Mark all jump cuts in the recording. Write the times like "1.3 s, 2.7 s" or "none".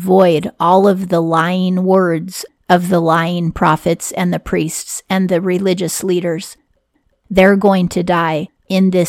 7.2 s